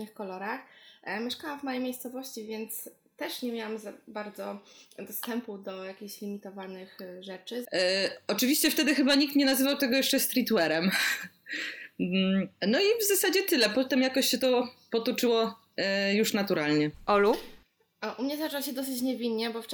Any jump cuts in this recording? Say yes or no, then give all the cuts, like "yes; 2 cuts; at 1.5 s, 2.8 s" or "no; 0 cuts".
yes; 1 cut; at 7.7 s